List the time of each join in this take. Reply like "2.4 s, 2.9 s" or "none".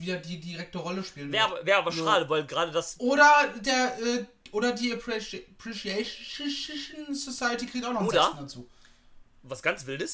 none